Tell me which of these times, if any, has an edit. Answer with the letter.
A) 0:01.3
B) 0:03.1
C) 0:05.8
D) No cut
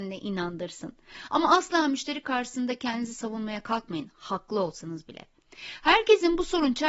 D